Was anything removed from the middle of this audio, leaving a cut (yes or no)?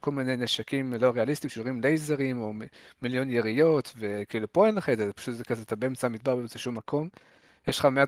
no